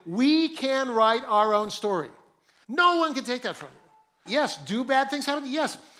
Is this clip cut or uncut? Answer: cut